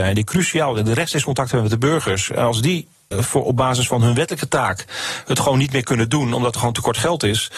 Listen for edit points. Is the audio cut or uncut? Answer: cut